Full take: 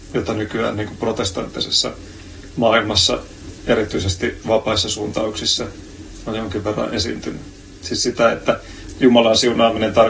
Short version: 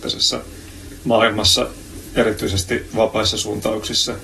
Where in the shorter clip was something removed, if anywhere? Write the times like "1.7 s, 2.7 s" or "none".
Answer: none